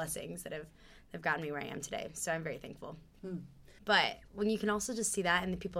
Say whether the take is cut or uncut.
cut